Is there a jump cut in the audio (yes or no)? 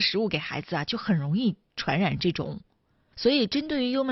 yes